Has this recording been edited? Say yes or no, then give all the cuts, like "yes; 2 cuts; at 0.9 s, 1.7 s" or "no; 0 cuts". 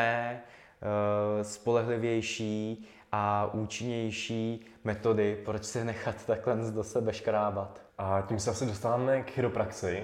yes; 2 cuts; at 5.4 s, 7.9 s